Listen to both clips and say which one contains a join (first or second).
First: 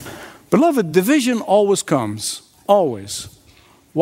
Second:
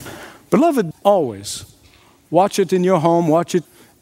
second